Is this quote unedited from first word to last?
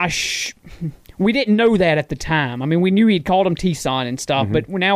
yes; 0 cuts

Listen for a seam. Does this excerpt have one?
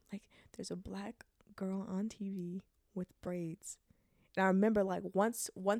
no; 0 cuts

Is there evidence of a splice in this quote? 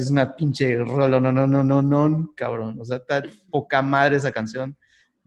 no; 0 cuts

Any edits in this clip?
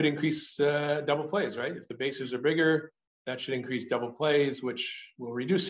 no; 0 cuts

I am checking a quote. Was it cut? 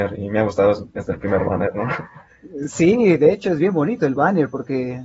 no; 0 cuts

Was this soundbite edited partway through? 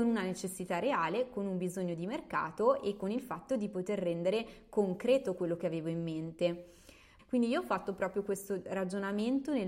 yes; 1 cut; at 7.2 s

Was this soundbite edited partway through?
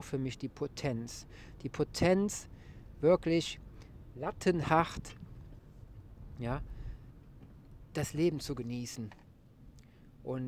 no; 0 cuts

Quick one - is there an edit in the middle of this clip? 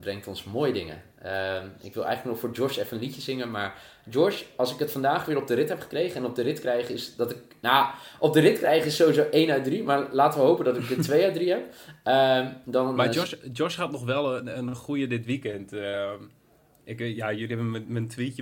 no; 0 cuts

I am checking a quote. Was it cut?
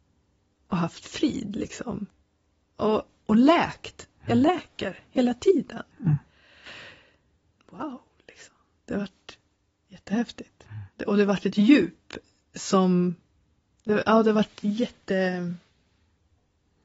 yes; 1 cut; at 7.5 s

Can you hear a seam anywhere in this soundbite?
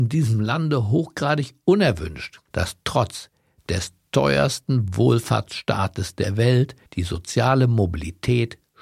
yes; 2 cuts; at 2.5 s, 6.9 s

